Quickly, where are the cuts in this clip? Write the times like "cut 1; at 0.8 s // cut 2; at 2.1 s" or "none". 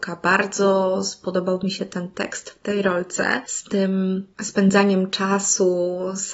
cut 1; at 4.3 s